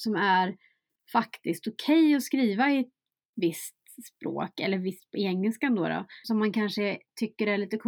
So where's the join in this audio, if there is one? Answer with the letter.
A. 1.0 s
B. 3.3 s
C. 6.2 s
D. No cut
C